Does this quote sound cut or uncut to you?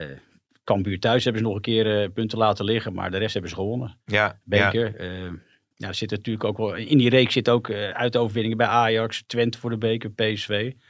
uncut